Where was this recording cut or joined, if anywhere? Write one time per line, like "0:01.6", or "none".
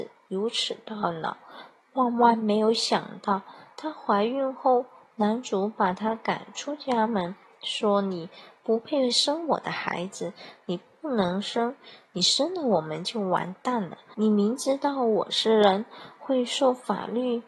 0:14.1